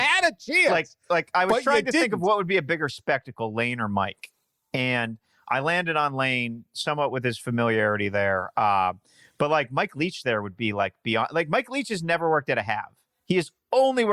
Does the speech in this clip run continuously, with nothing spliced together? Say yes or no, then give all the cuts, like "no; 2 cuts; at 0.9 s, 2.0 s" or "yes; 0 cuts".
yes; 0 cuts